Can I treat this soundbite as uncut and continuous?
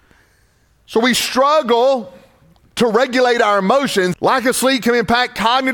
no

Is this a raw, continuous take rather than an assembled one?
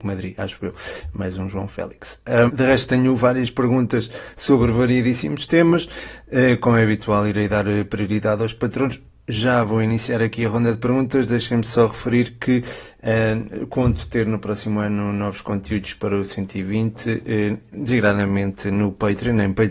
no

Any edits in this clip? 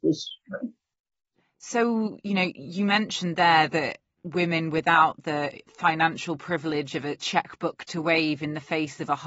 no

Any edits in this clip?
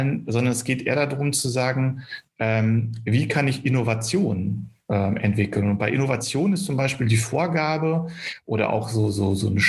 no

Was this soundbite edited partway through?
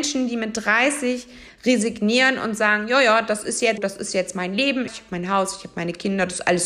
yes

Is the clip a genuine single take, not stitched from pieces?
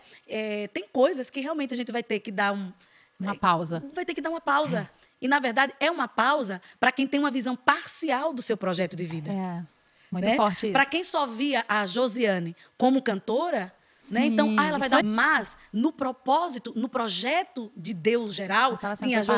no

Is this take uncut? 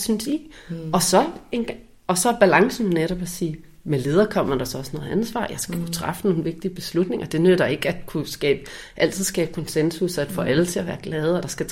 yes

